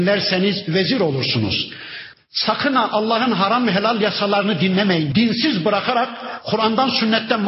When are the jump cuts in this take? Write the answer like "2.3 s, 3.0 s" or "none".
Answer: 2.1 s, 5.1 s